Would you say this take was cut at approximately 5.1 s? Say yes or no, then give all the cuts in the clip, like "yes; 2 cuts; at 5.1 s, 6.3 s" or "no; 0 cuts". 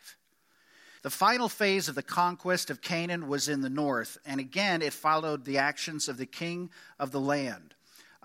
no; 1 cut; at 1.0 s